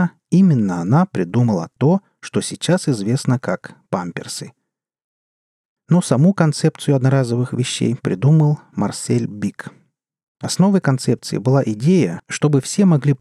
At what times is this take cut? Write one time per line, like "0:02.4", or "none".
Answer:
0:12.2